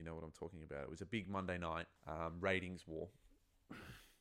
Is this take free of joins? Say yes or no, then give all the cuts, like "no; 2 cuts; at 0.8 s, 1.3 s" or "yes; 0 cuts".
no; 1 cut; at 2.0 s